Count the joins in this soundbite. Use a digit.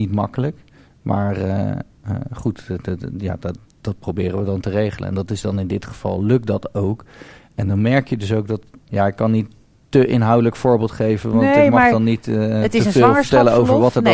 0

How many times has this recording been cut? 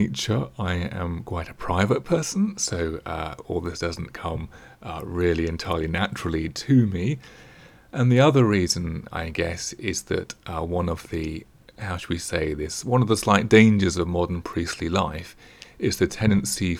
0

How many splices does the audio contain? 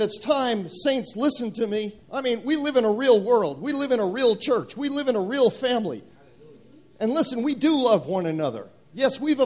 1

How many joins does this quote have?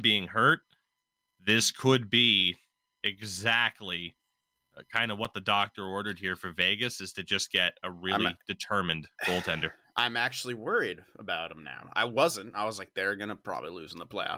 0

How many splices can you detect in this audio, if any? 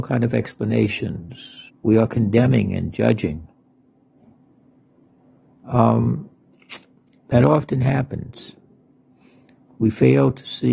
1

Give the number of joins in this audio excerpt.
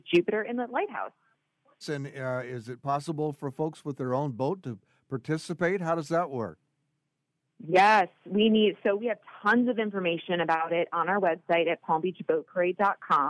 1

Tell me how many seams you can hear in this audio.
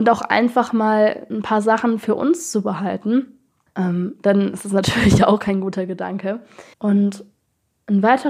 2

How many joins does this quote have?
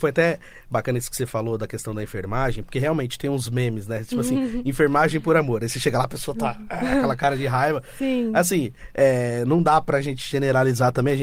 0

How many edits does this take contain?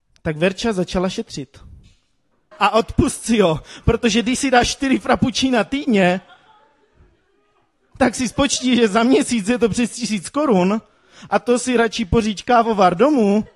1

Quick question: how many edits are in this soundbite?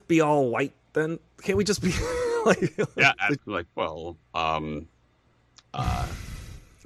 1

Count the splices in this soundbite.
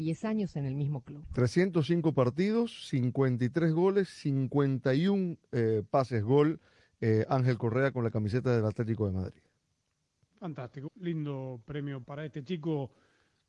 2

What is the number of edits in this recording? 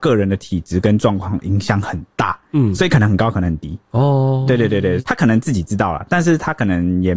0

